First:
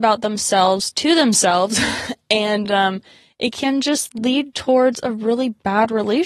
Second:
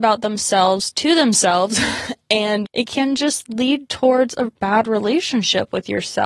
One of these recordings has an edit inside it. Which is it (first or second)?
second